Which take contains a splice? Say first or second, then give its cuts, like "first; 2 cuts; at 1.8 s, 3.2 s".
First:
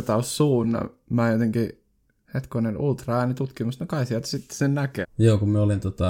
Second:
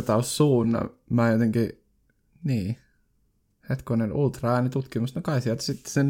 first; 2 cuts; at 2.2 s, 5.0 s